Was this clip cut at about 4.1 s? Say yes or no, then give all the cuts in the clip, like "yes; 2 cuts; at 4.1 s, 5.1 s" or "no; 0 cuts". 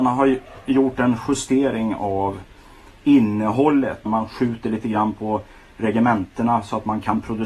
yes; 1 cut; at 4.1 s